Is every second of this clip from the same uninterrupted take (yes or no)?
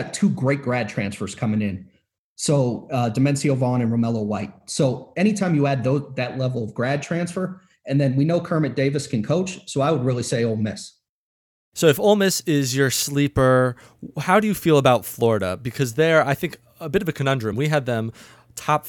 yes